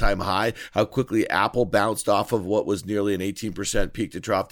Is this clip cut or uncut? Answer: uncut